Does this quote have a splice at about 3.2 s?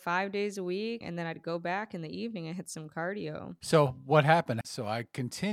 no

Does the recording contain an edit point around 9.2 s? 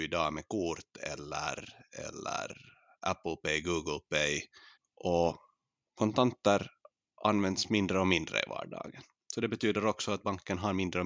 no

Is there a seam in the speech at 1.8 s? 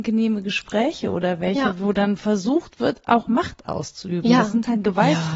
no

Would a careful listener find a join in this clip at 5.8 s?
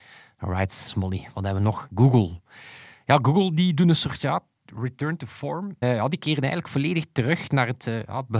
yes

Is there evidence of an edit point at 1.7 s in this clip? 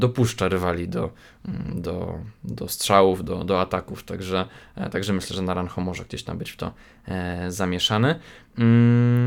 no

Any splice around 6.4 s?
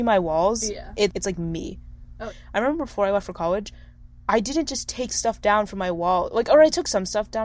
no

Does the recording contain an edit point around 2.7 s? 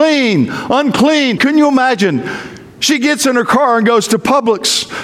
no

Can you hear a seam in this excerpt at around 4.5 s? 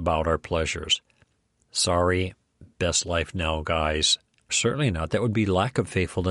yes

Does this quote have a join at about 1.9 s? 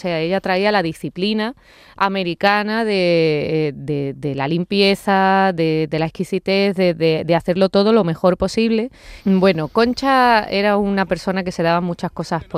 no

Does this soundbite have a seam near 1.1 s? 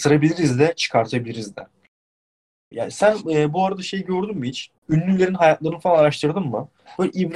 no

